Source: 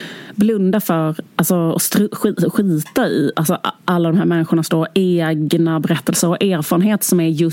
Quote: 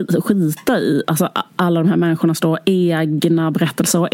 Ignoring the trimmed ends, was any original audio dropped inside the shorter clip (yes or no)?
no